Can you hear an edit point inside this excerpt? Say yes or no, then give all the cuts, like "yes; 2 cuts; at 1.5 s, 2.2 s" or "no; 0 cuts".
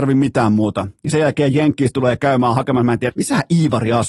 yes; 1 cut; at 3.1 s